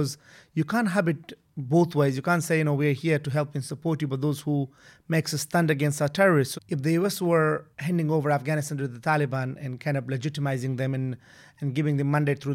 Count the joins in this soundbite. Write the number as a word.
two